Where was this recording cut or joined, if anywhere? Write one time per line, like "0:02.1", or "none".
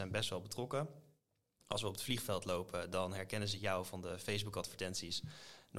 none